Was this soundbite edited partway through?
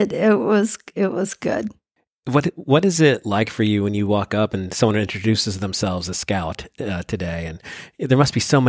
no; 0 cuts

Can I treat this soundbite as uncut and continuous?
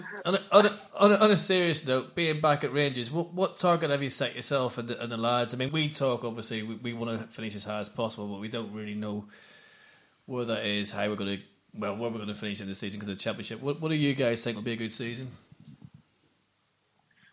no; 1 cut; at 5.7 s

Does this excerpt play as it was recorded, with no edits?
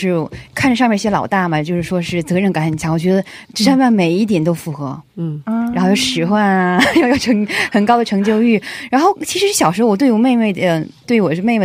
yes; 0 cuts

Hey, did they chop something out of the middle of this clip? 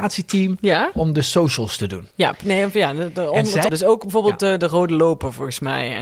yes; 2 cuts; at 2.1 s, 3.7 s

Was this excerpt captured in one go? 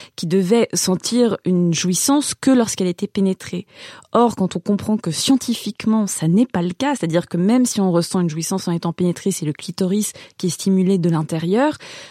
yes; 0 cuts

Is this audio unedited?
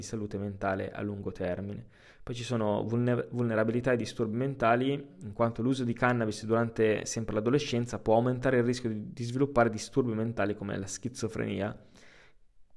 yes; 0 cuts

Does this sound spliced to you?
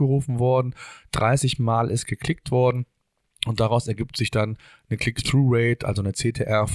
no; 0 cuts

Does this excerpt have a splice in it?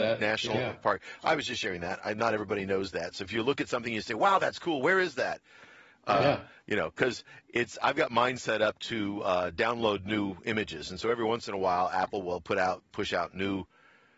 no; 0 cuts

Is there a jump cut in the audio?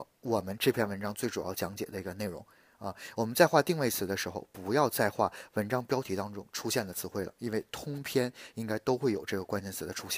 no; 0 cuts

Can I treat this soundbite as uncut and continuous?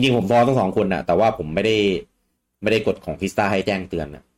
yes; 0 cuts

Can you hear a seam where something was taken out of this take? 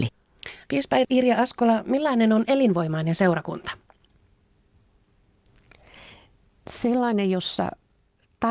no; 0 cuts

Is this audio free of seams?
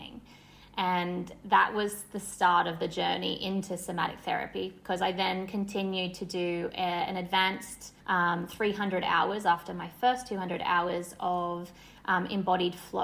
no; 1 cut; at 8.0 s

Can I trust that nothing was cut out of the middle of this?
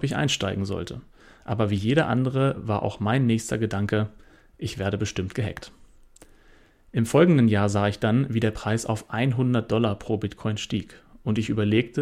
yes; 0 cuts

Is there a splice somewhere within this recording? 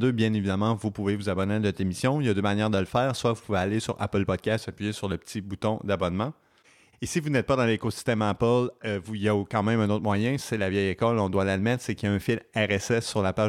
no; 0 cuts

